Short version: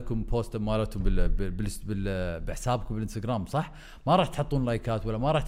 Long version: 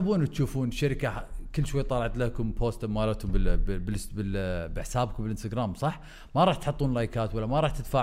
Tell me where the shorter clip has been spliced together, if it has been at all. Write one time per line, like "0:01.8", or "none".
none